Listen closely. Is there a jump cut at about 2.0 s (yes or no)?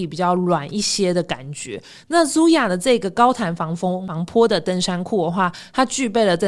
yes